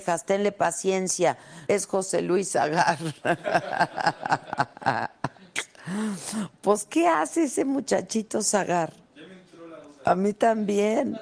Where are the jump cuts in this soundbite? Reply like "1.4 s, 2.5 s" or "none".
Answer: 1.7 s